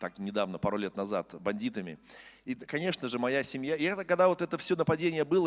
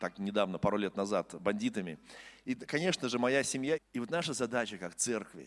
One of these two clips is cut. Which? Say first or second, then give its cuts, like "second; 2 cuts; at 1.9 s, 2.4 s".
second; 1 cut; at 3.8 s